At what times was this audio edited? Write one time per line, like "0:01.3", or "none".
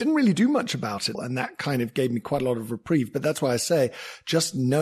0:01.1